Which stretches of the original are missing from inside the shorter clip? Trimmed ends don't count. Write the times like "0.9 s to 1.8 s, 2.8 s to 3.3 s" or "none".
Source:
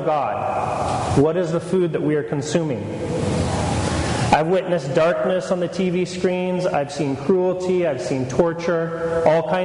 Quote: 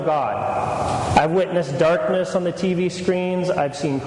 1.1 s to 4.3 s